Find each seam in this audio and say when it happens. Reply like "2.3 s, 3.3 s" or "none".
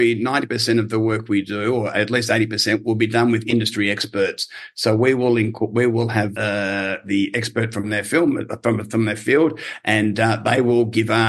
6.3 s